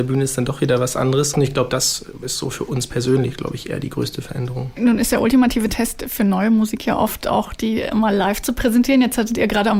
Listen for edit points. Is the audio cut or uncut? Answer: cut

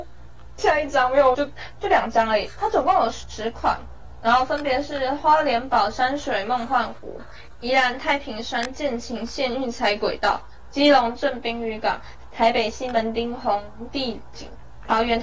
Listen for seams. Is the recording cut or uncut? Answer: cut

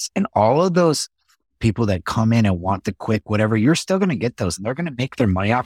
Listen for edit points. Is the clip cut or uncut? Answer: uncut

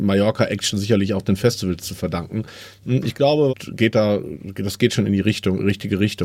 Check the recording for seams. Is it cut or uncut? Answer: cut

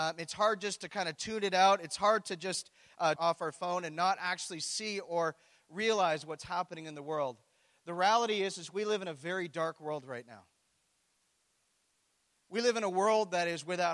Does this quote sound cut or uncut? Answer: cut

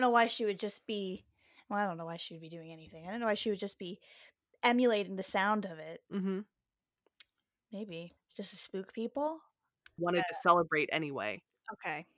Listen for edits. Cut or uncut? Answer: cut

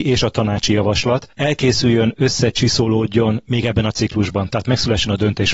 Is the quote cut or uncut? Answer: cut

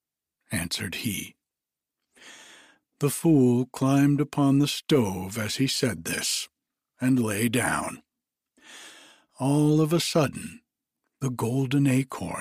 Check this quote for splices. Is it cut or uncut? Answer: uncut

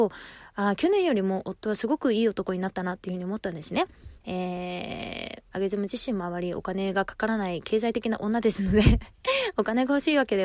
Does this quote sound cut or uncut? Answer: cut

